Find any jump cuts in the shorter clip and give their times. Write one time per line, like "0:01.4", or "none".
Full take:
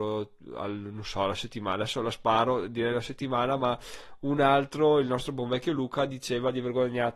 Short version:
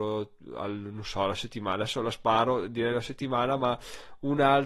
none